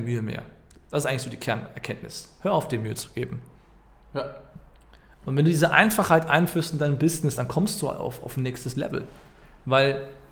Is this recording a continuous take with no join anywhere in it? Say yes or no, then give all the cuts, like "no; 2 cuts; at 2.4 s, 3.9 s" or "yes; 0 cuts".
yes; 0 cuts